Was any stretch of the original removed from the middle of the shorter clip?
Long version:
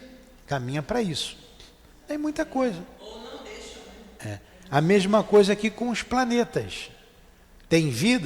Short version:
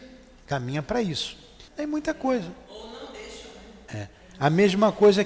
yes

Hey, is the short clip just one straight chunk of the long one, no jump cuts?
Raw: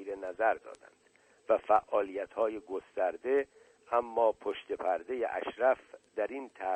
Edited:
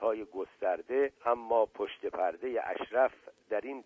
no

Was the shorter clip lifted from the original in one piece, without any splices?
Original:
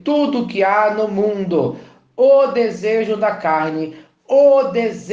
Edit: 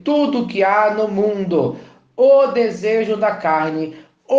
yes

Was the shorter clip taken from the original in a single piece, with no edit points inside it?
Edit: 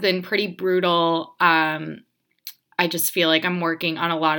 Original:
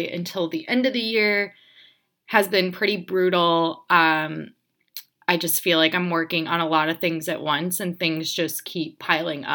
yes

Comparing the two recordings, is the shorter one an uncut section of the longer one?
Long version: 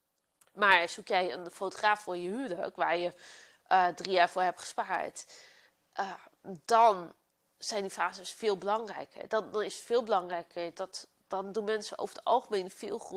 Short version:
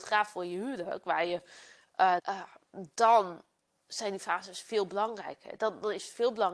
no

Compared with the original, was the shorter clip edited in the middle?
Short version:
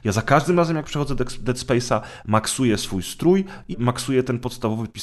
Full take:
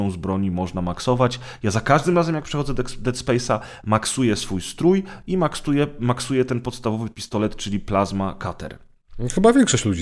yes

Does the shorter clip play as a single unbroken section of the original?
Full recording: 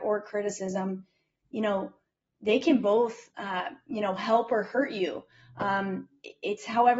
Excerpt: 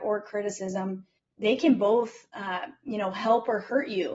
no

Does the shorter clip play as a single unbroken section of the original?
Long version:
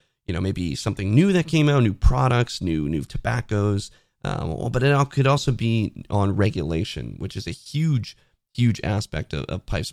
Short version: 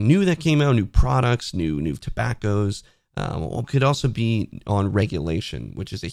no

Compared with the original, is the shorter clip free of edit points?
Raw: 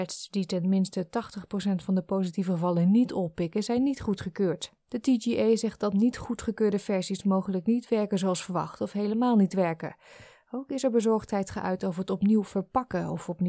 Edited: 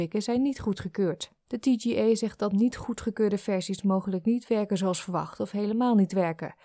yes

